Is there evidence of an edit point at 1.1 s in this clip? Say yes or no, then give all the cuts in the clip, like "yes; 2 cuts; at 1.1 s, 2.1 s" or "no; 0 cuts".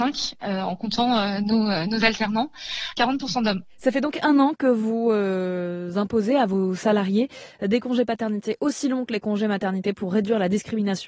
no; 1 cut; at 2.9 s